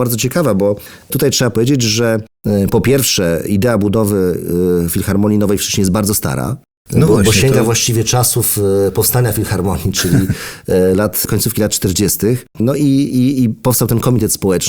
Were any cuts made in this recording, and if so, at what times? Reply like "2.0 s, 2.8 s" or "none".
12.5 s